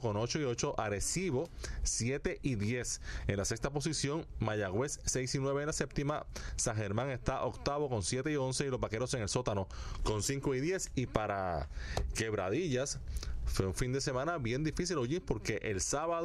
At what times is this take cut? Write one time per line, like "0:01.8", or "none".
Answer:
none